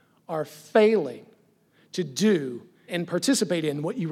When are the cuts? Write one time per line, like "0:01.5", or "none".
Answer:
0:02.9